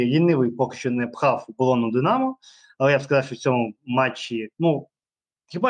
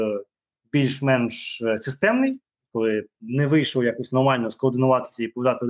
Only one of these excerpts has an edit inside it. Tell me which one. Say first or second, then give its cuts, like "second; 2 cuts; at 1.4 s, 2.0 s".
first; 1 cut; at 4.5 s